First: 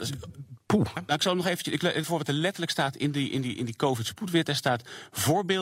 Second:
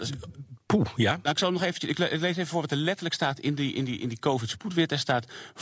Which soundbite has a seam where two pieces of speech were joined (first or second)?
first